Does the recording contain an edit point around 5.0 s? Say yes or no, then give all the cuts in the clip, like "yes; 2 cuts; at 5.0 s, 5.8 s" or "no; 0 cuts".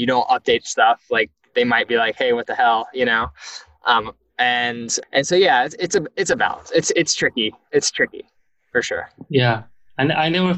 yes; 1 cut; at 5.0 s